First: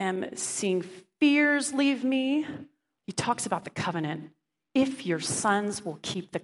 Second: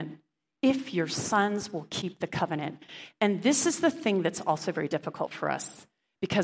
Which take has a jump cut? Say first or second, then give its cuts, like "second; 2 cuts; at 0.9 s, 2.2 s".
first; 1 cut; at 3.0 s